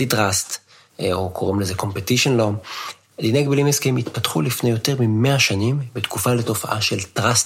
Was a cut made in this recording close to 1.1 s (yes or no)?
no